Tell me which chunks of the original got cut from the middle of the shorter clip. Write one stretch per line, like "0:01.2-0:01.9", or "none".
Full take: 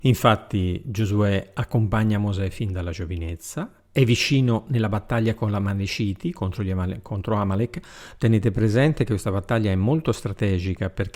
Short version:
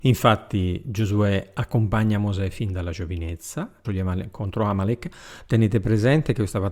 0:03.8-0:06.6